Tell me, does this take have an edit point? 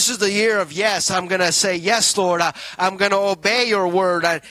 no; 0 cuts

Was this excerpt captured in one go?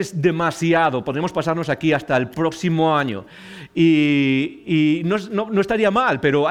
yes; 0 cuts

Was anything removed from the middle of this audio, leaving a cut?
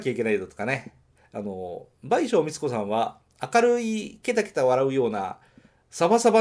yes; 1 cut; at 1.2 s

